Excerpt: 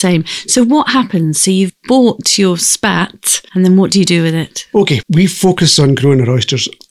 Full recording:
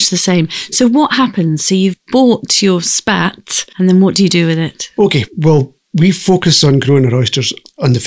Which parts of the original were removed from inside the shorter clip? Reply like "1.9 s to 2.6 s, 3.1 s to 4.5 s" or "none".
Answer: 5.3 s to 5.9 s